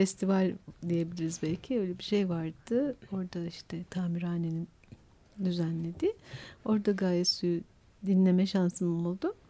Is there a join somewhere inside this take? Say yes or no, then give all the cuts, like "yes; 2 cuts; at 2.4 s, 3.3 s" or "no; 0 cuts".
no; 0 cuts